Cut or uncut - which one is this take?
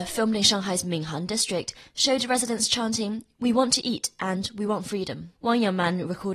cut